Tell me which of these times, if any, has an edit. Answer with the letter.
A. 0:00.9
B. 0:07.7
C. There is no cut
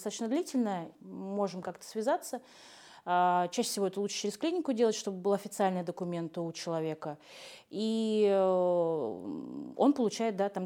A